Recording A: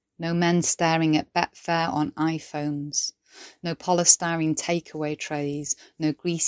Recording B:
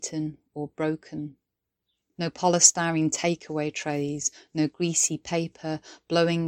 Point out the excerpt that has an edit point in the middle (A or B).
B